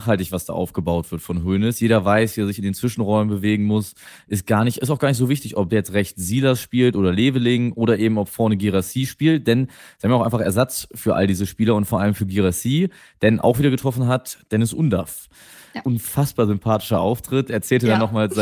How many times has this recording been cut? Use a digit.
1